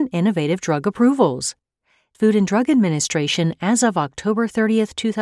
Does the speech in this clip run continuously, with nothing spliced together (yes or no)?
no